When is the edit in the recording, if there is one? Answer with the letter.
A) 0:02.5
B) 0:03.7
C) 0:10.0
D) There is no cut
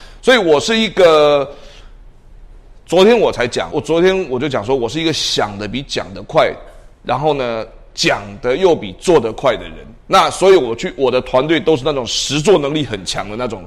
B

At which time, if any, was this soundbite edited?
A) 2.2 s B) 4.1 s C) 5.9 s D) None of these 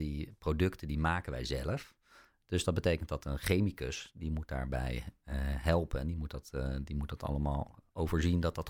D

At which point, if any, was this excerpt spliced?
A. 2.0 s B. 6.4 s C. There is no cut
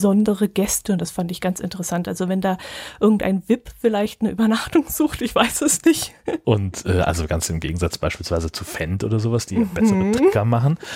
B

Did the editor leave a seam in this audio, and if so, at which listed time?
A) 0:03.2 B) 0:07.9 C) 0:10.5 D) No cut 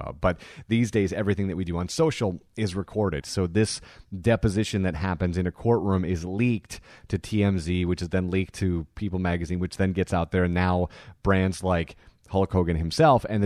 A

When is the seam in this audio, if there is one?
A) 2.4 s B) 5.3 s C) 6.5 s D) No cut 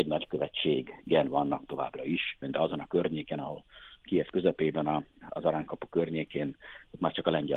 A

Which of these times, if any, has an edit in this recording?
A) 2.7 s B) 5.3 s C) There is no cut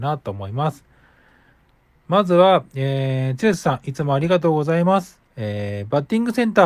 B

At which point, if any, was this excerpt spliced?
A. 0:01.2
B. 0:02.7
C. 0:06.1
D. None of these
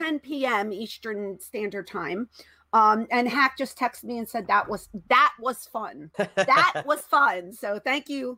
C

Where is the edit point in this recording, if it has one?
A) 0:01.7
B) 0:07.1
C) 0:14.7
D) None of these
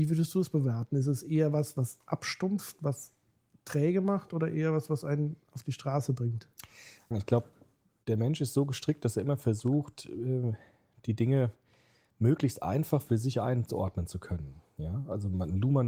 B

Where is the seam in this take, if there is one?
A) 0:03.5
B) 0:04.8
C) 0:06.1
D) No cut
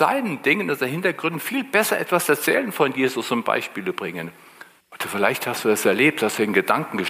B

